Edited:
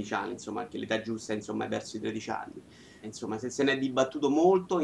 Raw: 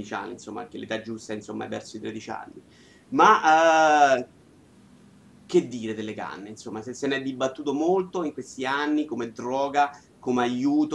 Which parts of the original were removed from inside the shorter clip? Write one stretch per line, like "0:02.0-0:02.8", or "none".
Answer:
0:03.0-0:06.5